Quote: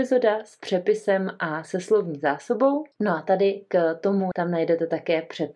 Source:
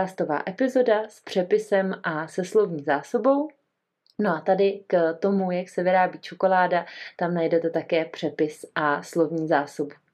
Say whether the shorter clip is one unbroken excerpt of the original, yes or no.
no